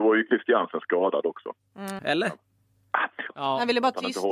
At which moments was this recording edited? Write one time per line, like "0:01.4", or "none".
0:02.0
0:03.3